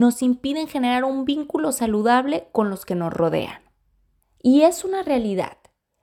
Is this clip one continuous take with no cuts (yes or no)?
no